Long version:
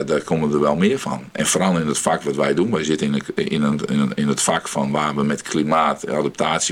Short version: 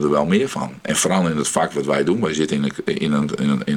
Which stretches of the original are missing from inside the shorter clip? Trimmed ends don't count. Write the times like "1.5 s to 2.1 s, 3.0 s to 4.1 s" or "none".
none